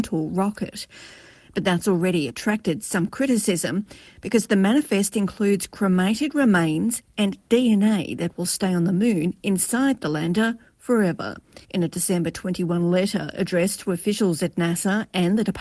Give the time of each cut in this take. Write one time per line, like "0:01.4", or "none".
0:11.6